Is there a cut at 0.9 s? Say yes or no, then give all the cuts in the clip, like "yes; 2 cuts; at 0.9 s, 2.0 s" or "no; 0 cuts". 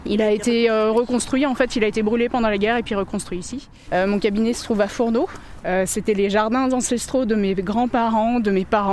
no; 2 cuts; at 3.9 s, 5.6 s